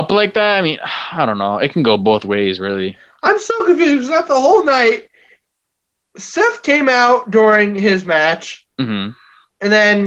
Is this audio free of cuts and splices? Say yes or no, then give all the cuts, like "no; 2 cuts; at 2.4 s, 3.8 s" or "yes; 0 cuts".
yes; 0 cuts